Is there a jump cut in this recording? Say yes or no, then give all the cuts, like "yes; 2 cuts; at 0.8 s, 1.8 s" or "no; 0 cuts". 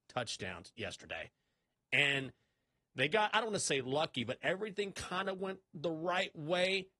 no; 0 cuts